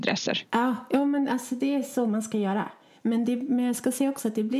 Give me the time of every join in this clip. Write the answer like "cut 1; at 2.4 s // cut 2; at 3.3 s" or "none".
cut 1; at 3.0 s